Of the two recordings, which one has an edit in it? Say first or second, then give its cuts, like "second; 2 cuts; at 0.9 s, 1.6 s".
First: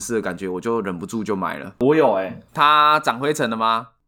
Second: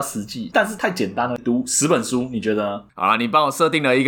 second; 2 cuts; at 1.4 s, 2.9 s